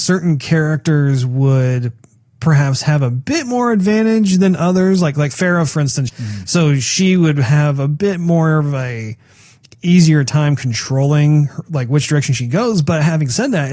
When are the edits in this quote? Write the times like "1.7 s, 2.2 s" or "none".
6.1 s